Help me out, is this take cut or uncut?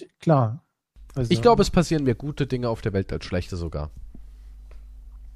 uncut